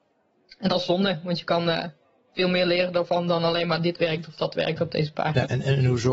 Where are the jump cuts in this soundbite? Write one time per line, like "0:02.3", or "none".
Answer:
none